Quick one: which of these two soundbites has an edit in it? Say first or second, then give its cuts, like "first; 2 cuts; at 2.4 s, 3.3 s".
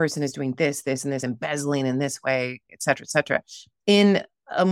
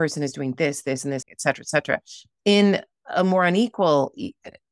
second; 1 cut; at 1.2 s